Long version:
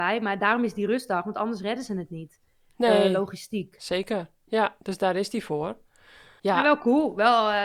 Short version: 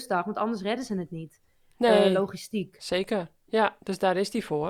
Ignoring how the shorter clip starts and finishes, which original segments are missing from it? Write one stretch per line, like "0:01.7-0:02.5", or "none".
none